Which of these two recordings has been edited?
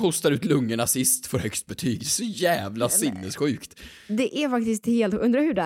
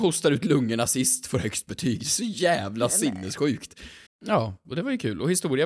second; 1 cut; at 4.1 s

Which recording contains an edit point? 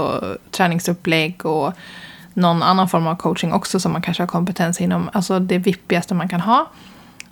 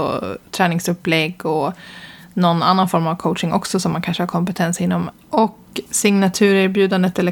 second; 1 cut; at 5.1 s

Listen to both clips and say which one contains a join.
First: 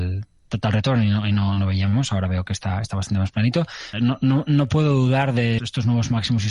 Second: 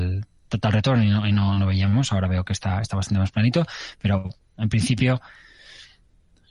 first; 2 cuts; at 3.9 s, 5.6 s

